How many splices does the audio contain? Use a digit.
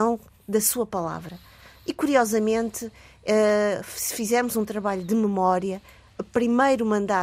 0